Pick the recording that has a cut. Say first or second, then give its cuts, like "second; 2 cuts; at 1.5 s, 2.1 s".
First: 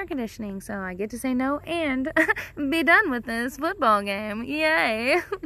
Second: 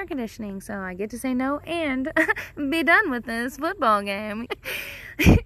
second; 1 cut; at 4.5 s